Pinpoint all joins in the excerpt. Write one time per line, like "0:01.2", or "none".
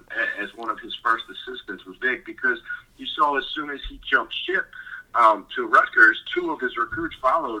0:02.0
0:05.5